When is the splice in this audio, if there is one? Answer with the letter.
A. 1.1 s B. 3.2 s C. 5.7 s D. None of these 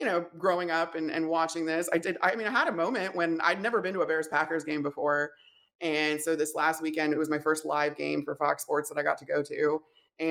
D